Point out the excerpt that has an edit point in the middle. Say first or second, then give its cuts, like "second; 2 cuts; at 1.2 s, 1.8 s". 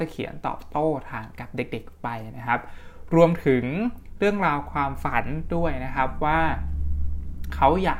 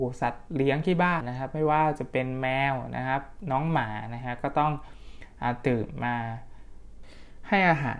second; 1 cut; at 1.2 s